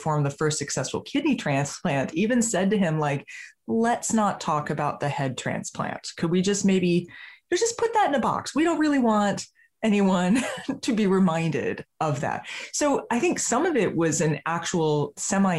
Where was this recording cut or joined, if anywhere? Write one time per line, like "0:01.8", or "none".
none

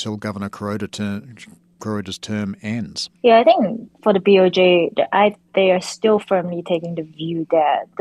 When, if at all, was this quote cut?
0:03.1

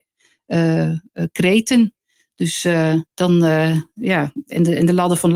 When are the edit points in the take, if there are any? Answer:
0:03.1

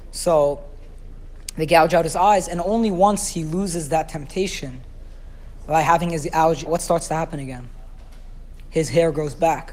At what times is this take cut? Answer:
0:06.7

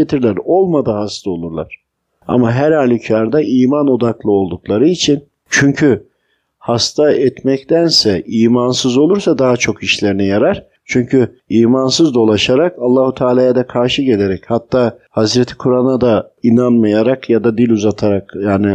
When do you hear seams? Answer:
none

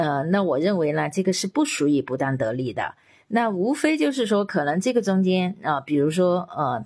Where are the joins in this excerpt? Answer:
none

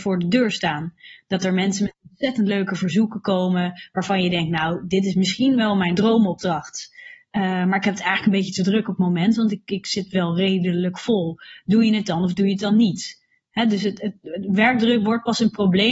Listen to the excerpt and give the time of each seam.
none

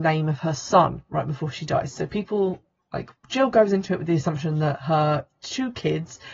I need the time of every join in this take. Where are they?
none

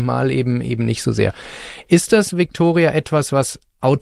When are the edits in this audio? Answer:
none

